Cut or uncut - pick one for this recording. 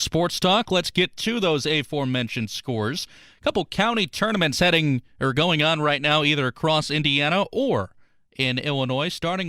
uncut